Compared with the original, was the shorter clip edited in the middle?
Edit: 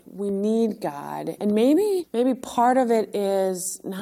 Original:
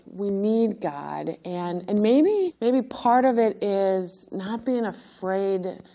yes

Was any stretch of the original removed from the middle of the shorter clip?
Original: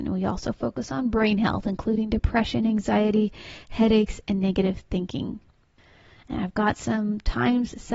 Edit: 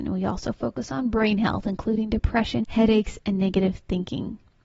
yes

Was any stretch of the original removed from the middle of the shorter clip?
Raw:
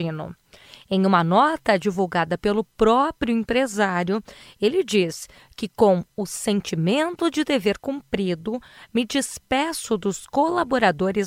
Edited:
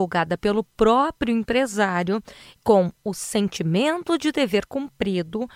yes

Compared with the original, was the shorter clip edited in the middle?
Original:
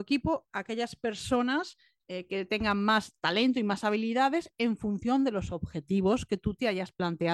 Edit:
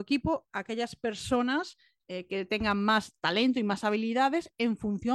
no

